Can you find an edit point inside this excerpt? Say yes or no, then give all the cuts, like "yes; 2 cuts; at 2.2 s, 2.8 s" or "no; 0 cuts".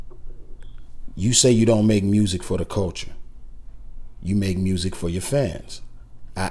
no; 0 cuts